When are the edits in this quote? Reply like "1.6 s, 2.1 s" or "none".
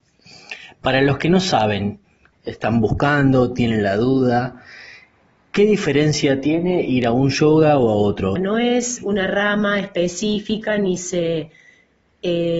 2.3 s, 8.4 s